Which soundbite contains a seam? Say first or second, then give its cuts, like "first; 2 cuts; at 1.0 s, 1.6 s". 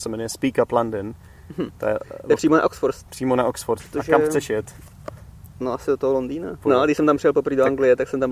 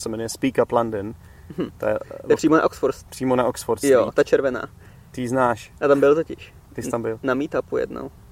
first; 2 cuts; at 3.8 s, 6.6 s